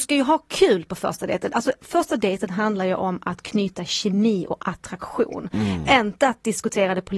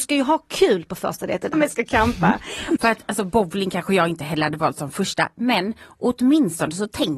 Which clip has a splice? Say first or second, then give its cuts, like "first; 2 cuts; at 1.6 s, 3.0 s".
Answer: second; 2 cuts; at 1.5 s, 2.8 s